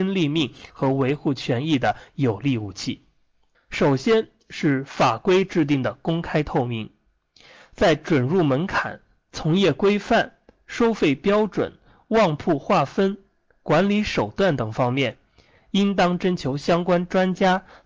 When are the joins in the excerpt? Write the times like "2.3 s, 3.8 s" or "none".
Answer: 3.5 s